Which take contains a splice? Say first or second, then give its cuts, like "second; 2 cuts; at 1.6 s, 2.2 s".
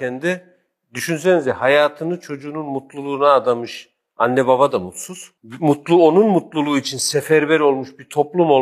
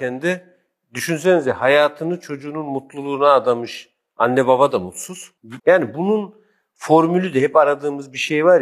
second; 1 cut; at 5.6 s